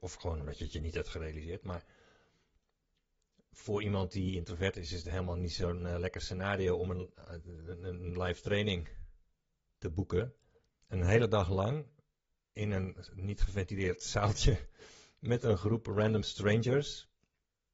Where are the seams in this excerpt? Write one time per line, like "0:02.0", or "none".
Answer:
0:10.8